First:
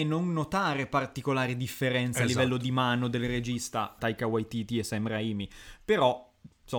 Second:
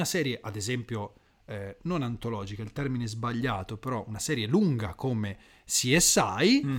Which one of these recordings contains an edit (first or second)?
first